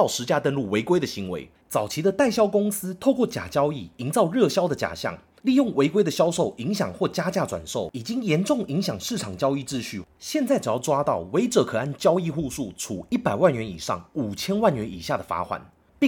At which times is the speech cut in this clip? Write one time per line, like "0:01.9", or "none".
0:01.6

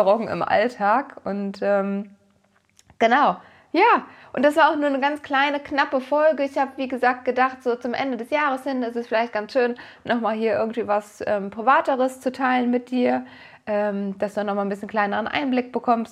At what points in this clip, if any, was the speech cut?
none

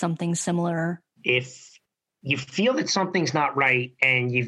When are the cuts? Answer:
0:01.2

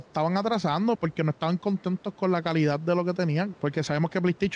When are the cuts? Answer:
0:00.9
0:03.5

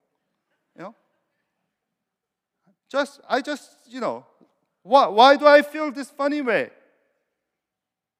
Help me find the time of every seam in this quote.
none

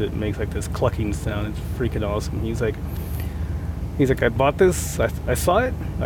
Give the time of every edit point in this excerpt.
none

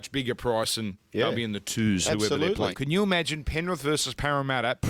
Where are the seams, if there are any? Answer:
0:02.7

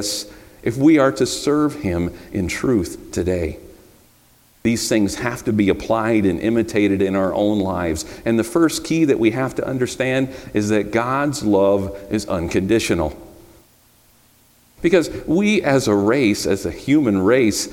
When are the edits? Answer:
0:14.8

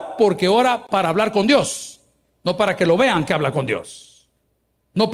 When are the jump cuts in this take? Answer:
none

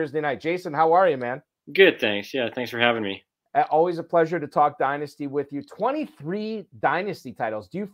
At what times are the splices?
none

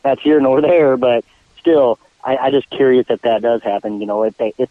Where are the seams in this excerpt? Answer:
none

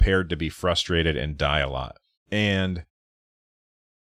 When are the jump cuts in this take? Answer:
0:02.2

